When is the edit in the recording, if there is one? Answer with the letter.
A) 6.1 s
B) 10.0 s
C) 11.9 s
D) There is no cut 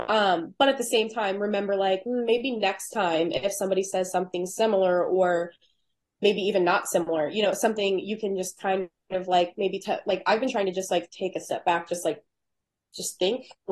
D